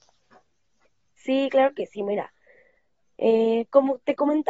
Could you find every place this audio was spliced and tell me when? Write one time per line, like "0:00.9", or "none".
none